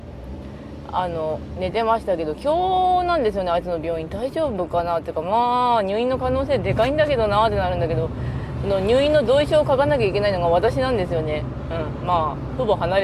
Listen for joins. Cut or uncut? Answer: uncut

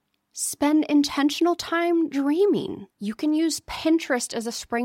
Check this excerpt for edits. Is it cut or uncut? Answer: cut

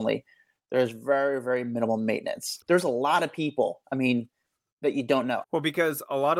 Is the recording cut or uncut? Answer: cut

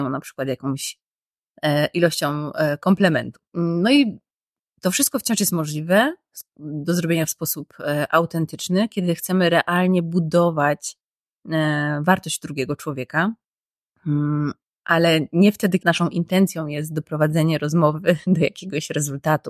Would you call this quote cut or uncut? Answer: cut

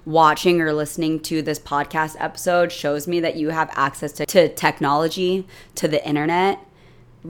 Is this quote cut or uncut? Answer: uncut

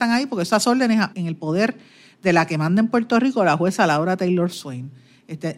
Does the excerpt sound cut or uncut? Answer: cut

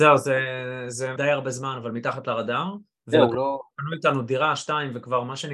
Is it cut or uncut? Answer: cut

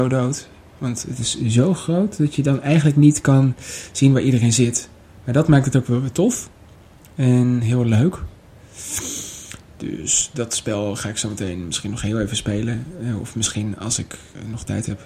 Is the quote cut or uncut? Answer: uncut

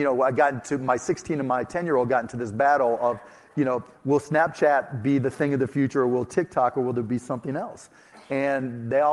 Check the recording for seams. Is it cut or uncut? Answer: uncut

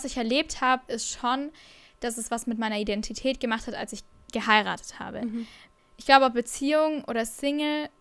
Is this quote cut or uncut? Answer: uncut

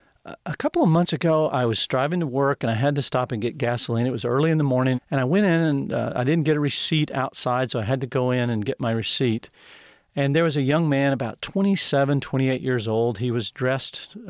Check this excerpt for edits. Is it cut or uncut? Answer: cut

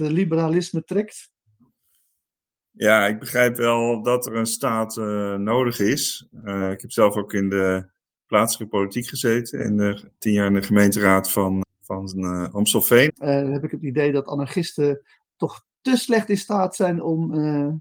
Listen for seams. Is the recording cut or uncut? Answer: cut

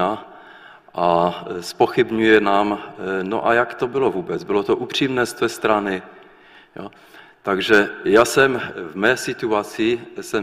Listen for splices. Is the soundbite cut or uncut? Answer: uncut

